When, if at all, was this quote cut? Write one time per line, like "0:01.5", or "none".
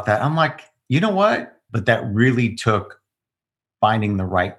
0:01.7